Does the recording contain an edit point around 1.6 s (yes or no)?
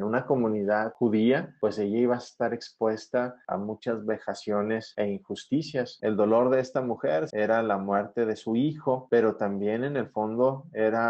no